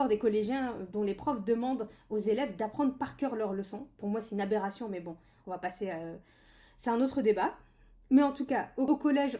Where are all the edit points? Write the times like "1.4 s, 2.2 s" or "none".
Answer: none